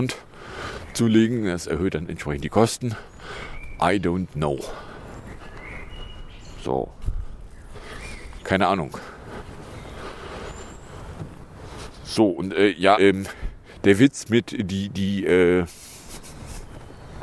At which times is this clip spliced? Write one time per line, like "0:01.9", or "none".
0:08.4
0:13.0